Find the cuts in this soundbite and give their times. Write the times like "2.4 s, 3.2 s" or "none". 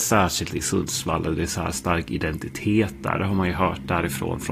none